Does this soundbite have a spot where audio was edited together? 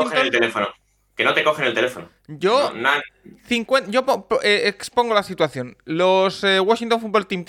no; 0 cuts

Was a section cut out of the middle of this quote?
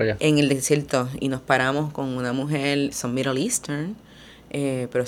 yes; 1 cut; at 2.9 s

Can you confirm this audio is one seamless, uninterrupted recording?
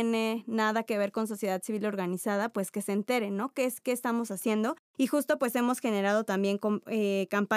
yes; 0 cuts

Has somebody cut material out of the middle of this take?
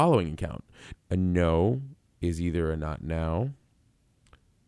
yes; 1 cut; at 0.9 s

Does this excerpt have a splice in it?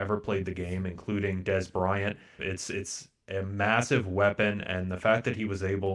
yes; 1 cut; at 2.4 s

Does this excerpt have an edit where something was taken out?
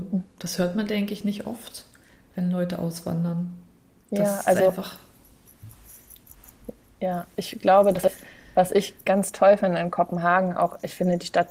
no; 0 cuts

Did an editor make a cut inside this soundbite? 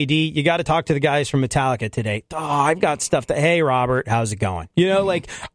no; 0 cuts

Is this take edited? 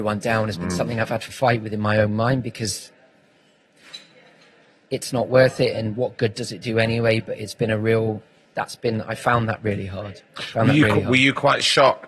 yes; 1 cut; at 8.5 s

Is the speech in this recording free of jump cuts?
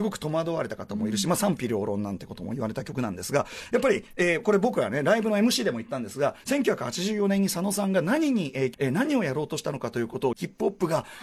no; 2 cuts; at 8.7 s, 10.3 s

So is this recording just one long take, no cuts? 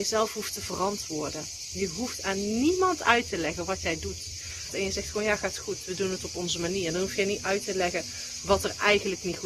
no; 1 cut; at 4.7 s

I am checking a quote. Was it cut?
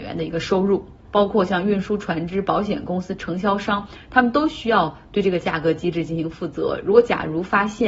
yes; 1 cut; at 1.0 s

